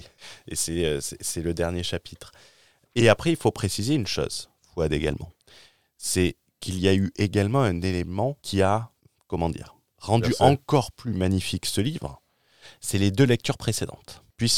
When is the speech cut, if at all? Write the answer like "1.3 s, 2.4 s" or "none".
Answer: none